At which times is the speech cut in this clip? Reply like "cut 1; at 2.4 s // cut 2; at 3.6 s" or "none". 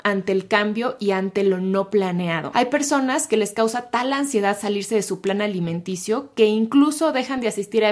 cut 1; at 2.5 s